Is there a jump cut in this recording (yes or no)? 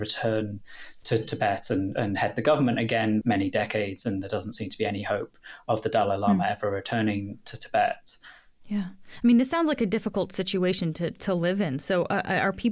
yes